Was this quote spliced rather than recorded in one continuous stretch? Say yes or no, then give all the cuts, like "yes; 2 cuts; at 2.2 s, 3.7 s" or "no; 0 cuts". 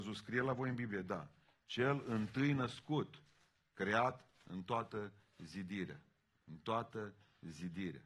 no; 0 cuts